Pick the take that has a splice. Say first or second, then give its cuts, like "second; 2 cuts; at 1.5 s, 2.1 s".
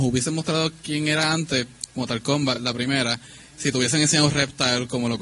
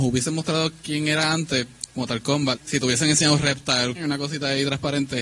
second; 2 cuts; at 2.6 s, 4.0 s